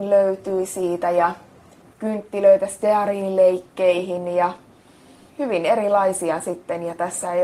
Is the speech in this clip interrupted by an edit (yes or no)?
no